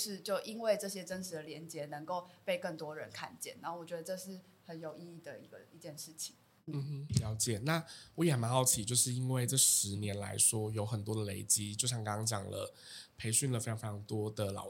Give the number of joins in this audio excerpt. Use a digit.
0